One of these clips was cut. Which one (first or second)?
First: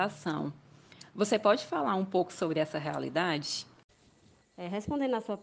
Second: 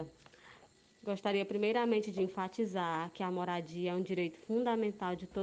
first